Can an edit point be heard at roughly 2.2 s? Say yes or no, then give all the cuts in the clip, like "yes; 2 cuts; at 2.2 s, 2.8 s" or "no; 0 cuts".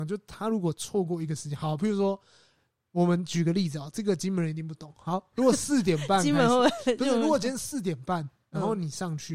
no; 0 cuts